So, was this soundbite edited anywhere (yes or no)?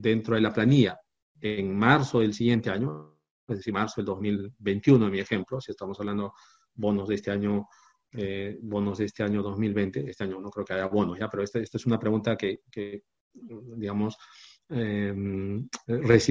no